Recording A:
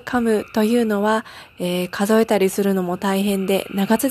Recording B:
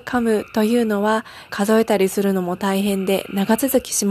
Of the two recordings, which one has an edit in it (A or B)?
B